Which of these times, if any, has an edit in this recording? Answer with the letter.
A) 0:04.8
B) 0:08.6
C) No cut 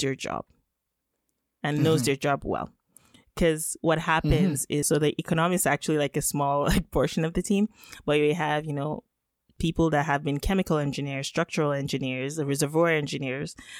A